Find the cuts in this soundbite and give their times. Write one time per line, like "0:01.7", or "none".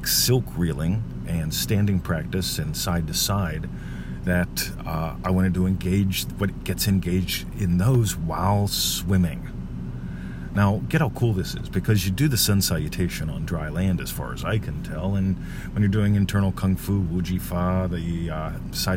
none